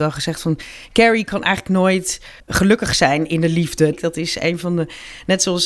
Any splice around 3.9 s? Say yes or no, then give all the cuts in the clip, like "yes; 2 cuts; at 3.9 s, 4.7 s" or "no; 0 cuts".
yes; 2 cuts; at 2.4 s, 3.9 s